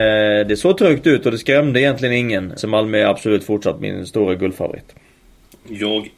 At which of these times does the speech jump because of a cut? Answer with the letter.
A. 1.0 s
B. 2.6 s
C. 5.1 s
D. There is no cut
B